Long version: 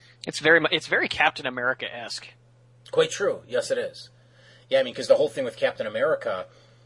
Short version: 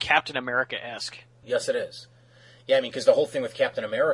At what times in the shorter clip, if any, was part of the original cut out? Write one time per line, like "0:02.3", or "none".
0:01.4